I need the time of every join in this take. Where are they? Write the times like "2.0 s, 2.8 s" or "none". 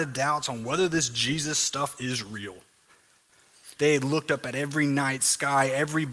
3.8 s